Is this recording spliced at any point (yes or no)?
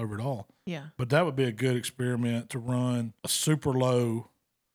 yes